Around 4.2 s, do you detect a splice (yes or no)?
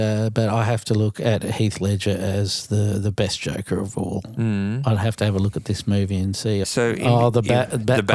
no